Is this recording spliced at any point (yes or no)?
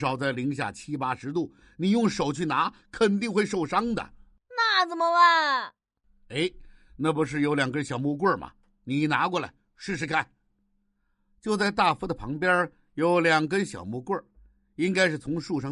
no